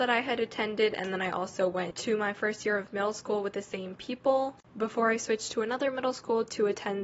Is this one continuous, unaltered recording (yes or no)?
yes